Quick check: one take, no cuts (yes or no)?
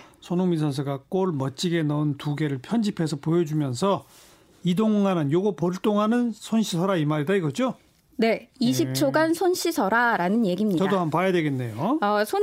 yes